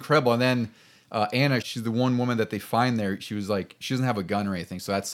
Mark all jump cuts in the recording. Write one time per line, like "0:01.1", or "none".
0:01.6